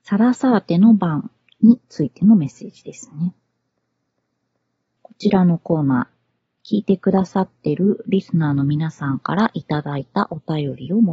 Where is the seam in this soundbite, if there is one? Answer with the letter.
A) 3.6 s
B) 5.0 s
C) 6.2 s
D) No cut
B